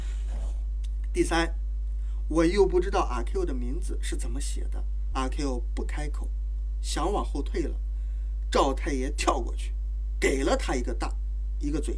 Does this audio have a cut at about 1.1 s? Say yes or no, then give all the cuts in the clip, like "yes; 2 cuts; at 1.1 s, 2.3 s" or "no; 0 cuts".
no; 1 cut; at 5.1 s